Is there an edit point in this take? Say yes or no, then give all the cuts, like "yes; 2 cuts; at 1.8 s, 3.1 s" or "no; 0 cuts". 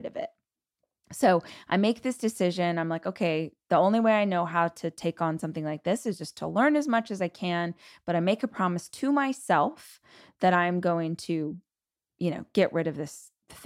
no; 0 cuts